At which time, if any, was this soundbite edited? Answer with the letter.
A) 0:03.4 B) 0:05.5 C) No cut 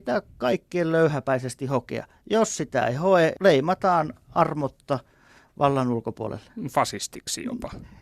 A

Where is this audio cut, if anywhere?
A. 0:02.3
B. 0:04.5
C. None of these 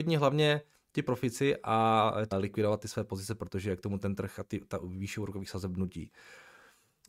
A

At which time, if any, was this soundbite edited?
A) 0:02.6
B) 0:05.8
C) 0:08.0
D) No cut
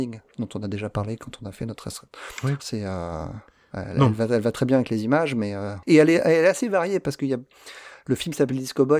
A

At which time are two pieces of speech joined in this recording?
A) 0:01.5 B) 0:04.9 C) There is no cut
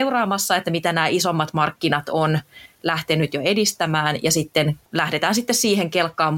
B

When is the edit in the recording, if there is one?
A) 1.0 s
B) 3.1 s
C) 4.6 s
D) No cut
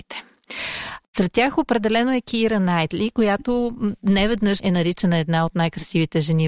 C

